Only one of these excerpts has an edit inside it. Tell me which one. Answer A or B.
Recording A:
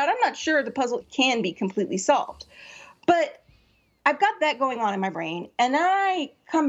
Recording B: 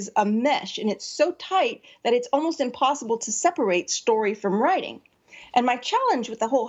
A